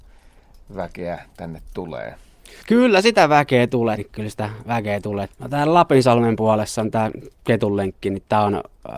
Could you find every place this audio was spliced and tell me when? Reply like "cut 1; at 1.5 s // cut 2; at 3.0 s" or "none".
cut 1; at 2.6 s // cut 2; at 4.0 s // cut 3; at 5.3 s